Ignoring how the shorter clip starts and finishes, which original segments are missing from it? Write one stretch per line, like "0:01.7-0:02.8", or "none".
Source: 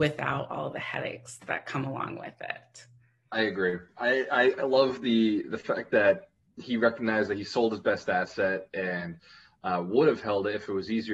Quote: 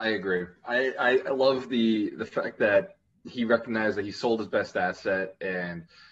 none